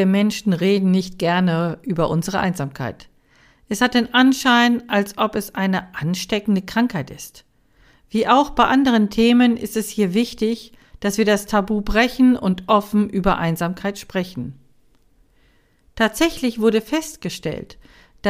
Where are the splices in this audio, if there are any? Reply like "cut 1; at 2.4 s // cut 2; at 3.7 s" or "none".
none